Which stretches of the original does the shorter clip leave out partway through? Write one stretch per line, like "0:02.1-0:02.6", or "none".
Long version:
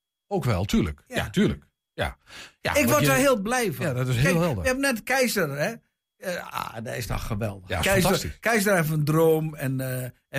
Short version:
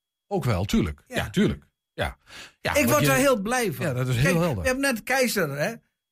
none